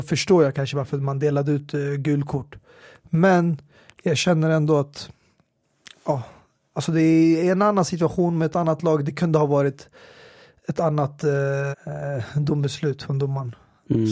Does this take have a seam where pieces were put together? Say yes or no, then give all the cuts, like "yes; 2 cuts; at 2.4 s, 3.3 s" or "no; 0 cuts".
yes; 1 cut; at 11.7 s